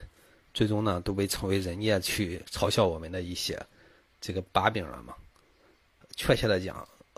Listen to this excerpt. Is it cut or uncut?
uncut